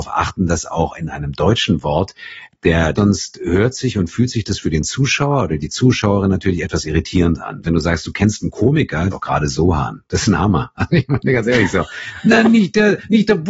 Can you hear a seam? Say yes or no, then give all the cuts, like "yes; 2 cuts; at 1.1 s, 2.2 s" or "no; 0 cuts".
yes; 3 cuts; at 3.0 s, 7.6 s, 9.1 s